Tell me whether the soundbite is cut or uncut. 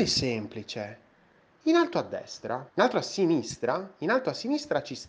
cut